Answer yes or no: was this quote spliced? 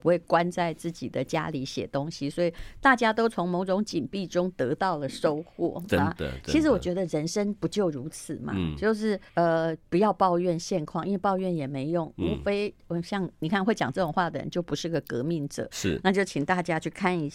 yes